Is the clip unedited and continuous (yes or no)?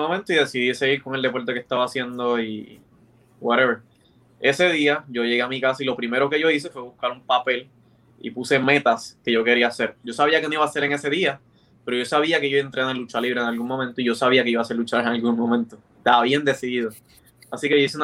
no